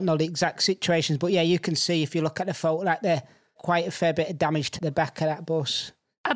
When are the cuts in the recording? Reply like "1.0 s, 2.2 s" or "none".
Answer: 3.6 s, 4.8 s